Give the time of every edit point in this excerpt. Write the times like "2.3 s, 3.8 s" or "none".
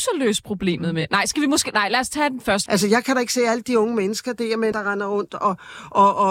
2.7 s, 4.7 s

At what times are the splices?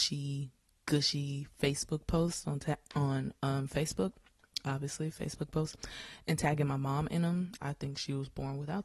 7.6 s

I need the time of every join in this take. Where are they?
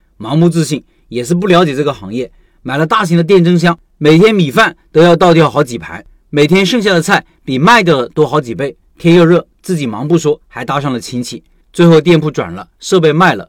11.6 s

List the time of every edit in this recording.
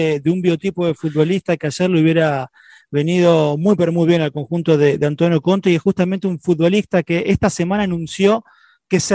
none

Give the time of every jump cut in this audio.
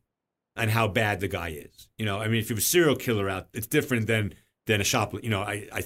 3.5 s

